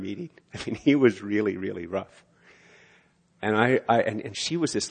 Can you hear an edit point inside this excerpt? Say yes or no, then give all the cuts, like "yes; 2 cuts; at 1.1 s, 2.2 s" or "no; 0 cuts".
no; 0 cuts